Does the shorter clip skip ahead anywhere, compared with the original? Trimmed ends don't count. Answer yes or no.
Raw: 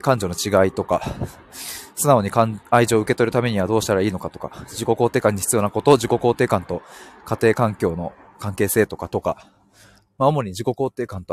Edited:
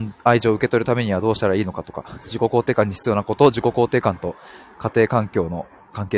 no